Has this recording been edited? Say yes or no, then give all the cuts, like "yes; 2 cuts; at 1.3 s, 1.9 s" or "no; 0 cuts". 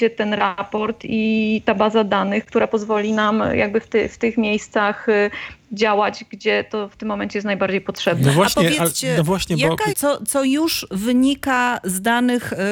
yes; 1 cut; at 9.9 s